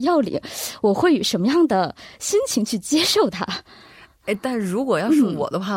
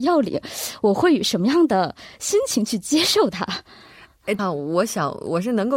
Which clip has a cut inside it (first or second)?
second